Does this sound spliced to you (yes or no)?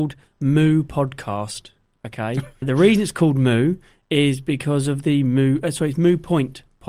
yes